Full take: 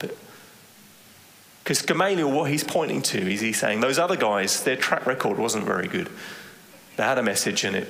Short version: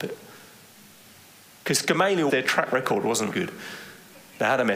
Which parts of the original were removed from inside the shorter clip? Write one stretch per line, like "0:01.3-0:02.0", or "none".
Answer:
0:02.3-0:04.6
0:05.6-0:05.9